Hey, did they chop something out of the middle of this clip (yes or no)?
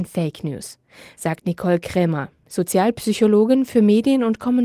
no